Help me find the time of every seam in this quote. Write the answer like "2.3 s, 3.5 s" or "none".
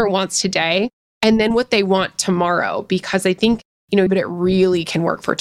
4.1 s